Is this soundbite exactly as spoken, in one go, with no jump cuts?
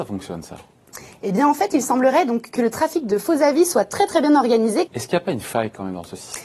no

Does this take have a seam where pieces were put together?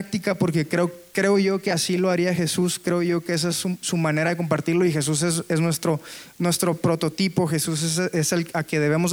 no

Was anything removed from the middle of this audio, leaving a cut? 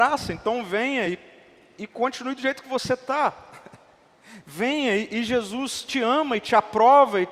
no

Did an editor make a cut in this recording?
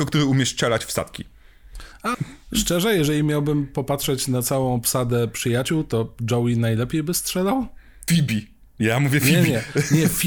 yes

